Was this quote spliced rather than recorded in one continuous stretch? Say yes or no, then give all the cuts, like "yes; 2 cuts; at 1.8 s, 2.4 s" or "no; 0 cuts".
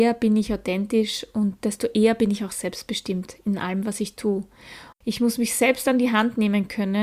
yes; 1 cut; at 4.9 s